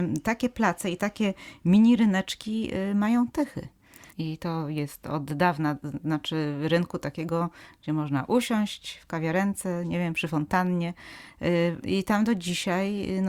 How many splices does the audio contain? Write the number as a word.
two